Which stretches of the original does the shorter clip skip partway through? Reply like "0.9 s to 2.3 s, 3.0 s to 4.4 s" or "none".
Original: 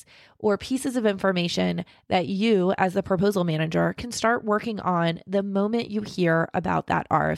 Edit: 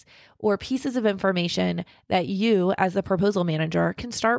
none